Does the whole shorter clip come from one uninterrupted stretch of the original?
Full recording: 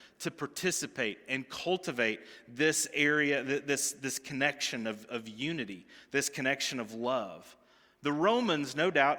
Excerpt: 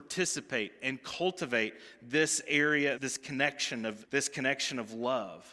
no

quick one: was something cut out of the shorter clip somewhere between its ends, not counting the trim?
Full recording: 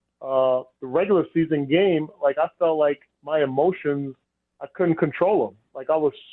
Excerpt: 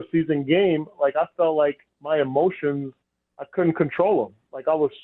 no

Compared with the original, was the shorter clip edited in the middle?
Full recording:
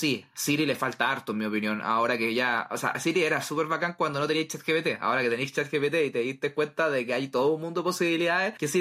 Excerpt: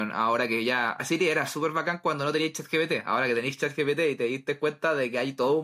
yes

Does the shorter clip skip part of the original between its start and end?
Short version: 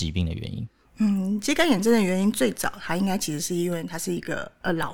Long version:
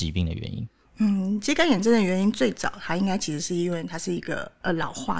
no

